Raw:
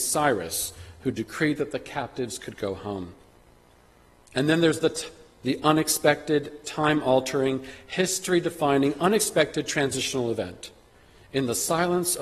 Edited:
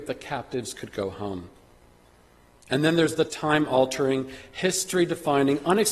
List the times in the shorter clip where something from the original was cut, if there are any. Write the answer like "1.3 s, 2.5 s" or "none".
3.3 s